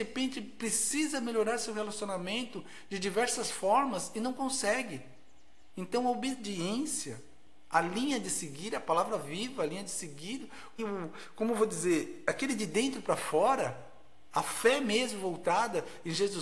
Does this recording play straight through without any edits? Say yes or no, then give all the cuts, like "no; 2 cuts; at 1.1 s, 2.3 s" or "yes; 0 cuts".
no; 1 cut; at 10.8 s